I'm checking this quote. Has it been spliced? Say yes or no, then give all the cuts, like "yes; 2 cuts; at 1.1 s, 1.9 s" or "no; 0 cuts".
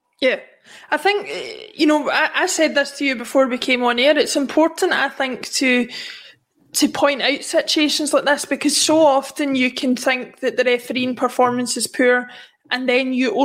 no; 0 cuts